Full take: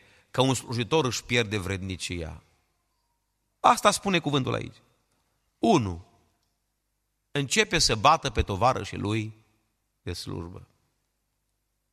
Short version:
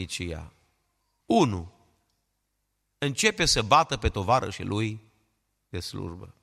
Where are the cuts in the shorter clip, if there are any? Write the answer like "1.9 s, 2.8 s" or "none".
1.2 s